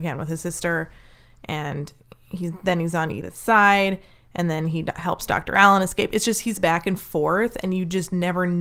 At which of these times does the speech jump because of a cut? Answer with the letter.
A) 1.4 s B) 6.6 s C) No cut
B